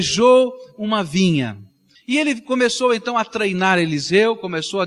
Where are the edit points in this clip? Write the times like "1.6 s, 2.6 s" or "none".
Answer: 1.9 s